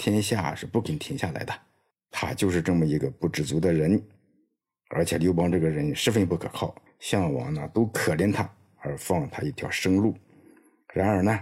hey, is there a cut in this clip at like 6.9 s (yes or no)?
yes